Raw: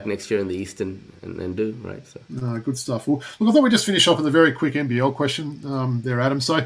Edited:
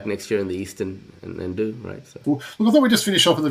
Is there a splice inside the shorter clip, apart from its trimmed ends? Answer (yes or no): yes